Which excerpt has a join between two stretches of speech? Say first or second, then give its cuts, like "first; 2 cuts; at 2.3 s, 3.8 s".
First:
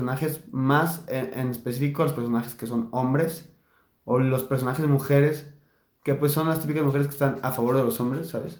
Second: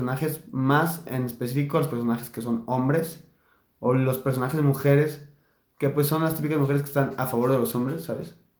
second; 1 cut; at 1.1 s